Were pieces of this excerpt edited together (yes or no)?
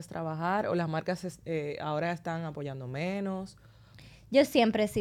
no